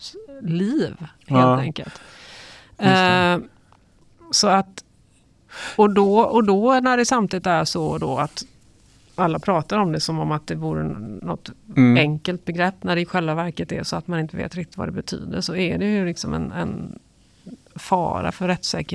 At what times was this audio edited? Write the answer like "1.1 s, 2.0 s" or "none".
none